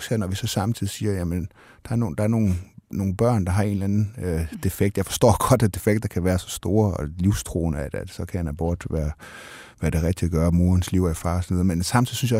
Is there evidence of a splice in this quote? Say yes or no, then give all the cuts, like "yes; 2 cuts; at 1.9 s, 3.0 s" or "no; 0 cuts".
no; 0 cuts